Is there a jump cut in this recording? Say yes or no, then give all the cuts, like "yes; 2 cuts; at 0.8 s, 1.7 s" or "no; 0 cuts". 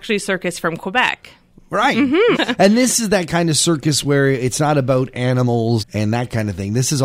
yes; 2 cuts; at 2.3 s, 5.8 s